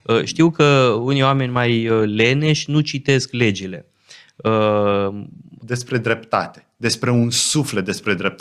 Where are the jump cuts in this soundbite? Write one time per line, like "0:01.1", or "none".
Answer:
0:05.6